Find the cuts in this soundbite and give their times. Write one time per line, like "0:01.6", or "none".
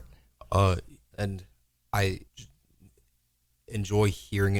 0:01.1
0:02.3